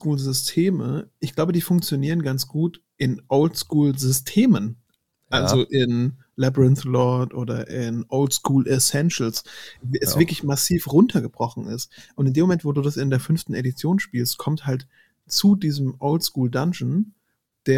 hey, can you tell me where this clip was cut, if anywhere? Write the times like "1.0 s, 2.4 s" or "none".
9.8 s